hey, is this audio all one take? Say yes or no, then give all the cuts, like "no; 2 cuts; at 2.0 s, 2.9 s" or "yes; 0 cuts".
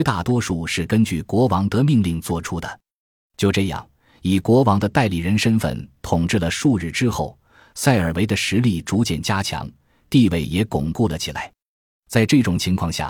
yes; 0 cuts